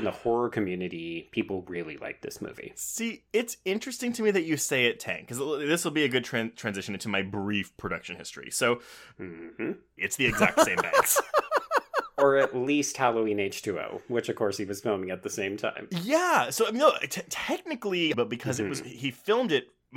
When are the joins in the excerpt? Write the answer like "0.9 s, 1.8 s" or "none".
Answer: 10.0 s, 18.1 s